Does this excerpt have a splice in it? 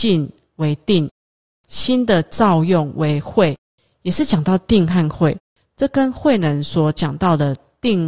no; 0 cuts

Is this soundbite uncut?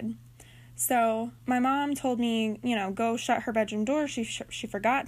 no; 1 cut; at 1.4 s

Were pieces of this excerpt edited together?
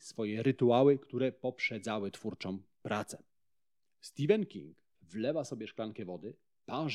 yes; 1 cut; at 5.0 s

